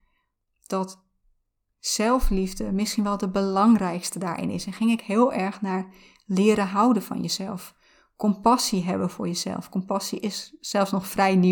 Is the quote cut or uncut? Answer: uncut